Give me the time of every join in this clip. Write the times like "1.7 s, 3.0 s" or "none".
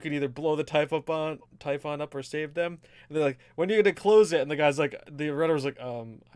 none